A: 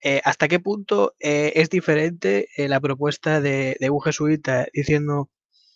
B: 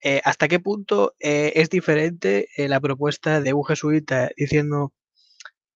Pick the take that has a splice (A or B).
B